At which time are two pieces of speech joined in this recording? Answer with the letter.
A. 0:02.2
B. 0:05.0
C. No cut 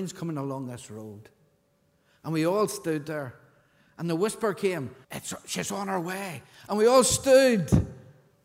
B